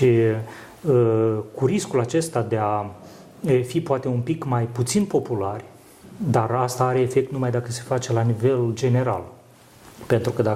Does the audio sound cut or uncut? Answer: uncut